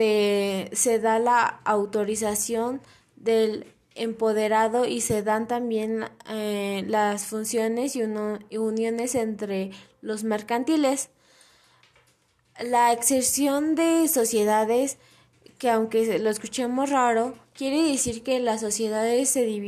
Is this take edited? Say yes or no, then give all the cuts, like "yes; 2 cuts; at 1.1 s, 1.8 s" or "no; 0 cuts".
no; 0 cuts